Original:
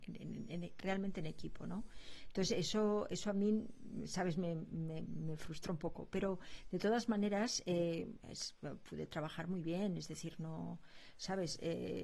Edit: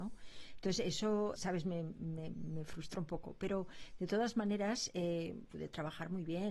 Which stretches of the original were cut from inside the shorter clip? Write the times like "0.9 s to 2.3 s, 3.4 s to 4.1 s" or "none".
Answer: 3.1 s to 4.1 s, 8.2 s to 8.9 s